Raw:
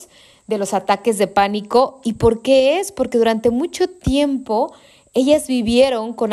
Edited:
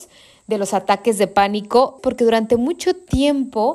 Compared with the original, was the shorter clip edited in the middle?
yes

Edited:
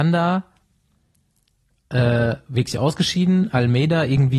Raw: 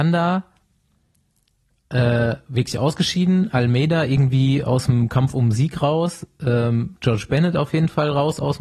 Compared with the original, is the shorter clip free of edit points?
yes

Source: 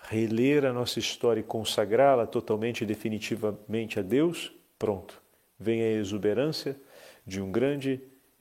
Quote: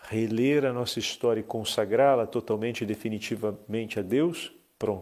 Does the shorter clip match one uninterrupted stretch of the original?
yes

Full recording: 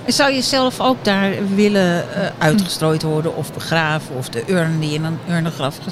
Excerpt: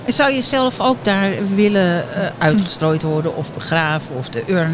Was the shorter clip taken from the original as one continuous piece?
yes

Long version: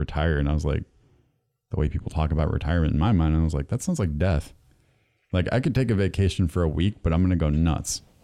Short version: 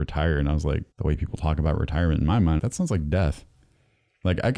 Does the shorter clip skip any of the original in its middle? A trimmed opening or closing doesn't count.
yes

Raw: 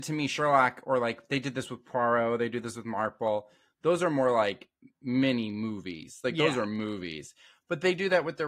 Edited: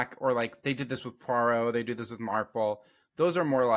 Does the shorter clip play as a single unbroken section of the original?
yes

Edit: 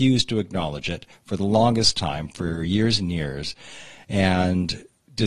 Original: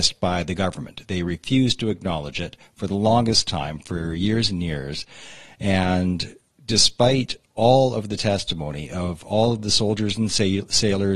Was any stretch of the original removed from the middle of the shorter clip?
no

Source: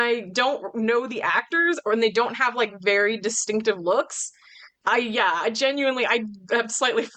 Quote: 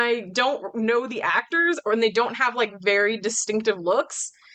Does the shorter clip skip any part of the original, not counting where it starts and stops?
no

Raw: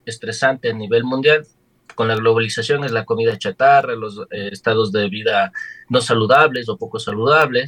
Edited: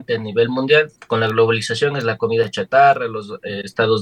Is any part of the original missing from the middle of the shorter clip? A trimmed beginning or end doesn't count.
yes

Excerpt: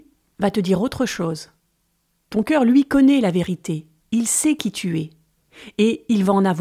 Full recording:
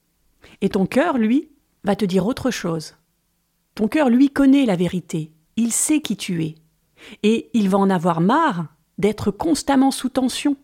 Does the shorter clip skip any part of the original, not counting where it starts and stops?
no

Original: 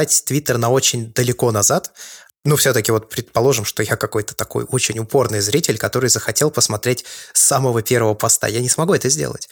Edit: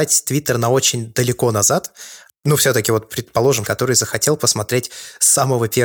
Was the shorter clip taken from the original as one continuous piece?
no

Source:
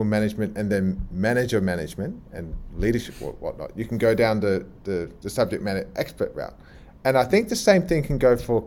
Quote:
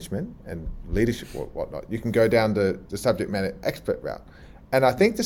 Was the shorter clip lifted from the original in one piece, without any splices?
no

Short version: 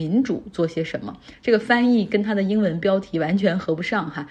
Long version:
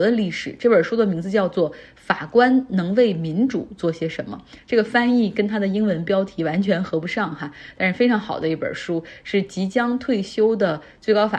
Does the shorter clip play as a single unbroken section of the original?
yes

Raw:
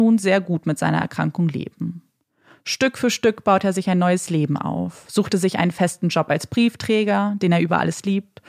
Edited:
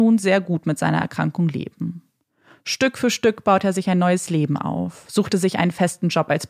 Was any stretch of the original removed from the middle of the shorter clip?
no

